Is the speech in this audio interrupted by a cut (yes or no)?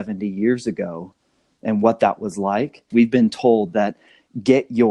yes